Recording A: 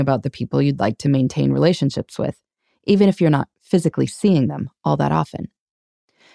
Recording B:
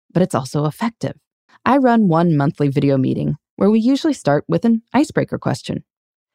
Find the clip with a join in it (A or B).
B